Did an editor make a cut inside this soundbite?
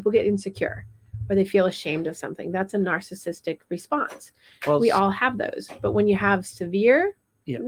no; 0 cuts

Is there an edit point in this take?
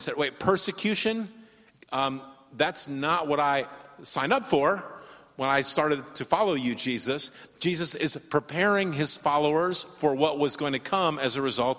no; 0 cuts

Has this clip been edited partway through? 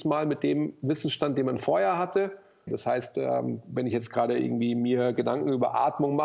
yes; 1 cut; at 2.7 s

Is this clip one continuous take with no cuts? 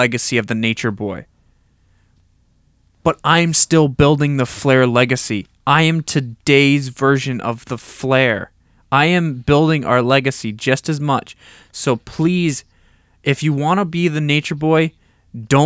yes; 0 cuts

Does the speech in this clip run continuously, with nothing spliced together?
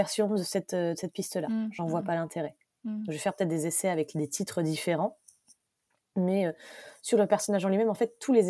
yes; 0 cuts

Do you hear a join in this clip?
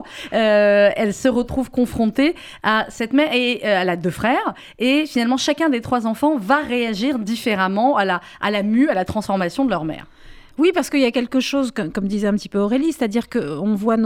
no; 0 cuts

